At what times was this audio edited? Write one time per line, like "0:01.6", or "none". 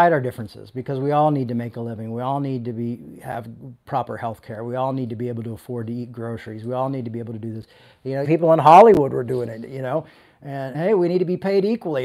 0:08.2
0:10.7

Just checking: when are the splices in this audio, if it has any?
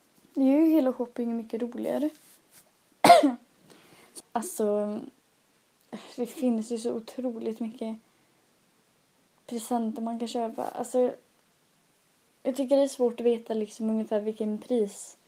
0:04.2

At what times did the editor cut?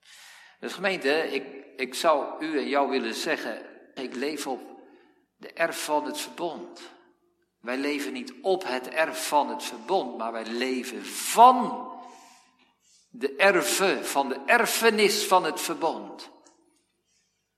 0:04.0

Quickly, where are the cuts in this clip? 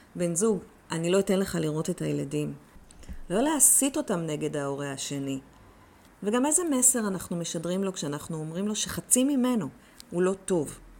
0:06.1
0:10.0

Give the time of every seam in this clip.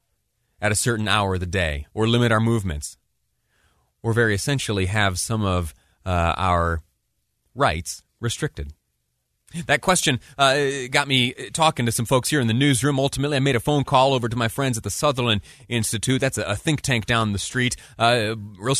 0:01.9

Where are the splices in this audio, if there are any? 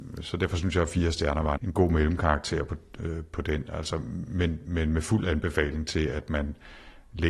0:01.6

